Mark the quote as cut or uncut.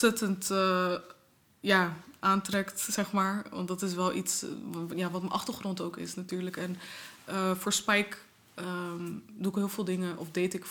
uncut